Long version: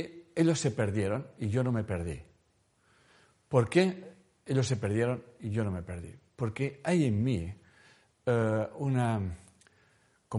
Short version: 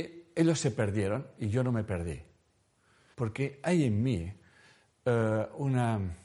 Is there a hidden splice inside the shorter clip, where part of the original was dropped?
yes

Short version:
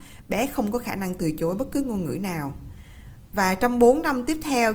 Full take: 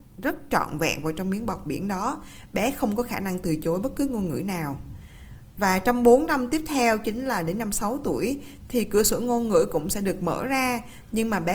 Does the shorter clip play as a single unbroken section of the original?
yes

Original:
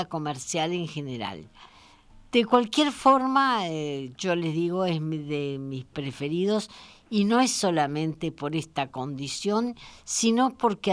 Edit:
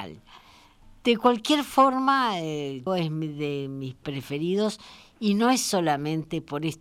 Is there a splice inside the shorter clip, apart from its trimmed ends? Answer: yes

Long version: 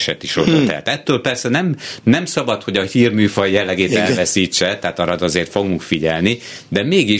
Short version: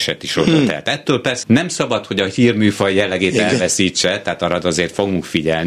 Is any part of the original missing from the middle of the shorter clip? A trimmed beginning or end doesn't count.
yes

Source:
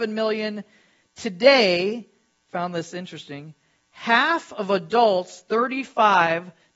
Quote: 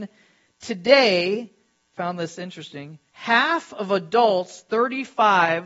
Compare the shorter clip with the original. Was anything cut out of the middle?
yes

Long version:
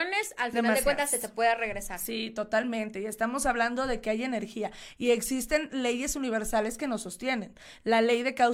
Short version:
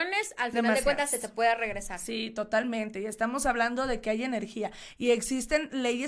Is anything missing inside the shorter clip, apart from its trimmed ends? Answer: no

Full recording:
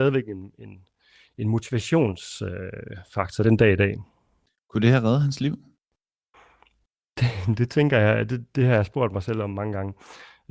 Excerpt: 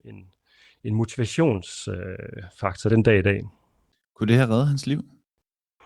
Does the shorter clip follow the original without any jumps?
yes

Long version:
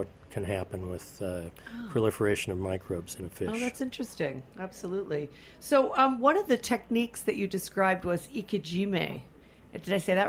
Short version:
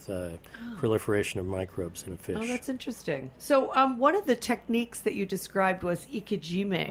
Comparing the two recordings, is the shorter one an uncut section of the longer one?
no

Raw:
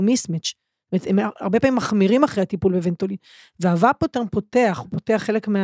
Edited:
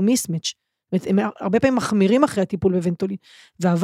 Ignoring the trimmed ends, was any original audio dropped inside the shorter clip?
no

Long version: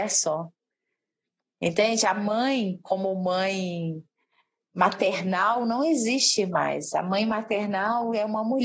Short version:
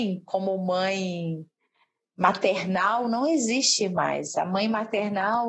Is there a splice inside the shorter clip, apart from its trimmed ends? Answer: no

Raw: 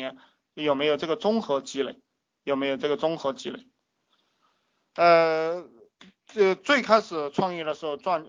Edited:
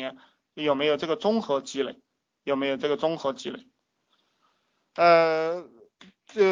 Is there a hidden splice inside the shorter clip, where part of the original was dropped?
no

